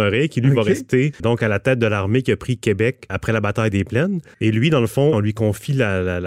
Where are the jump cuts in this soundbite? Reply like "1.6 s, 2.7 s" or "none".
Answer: 5.1 s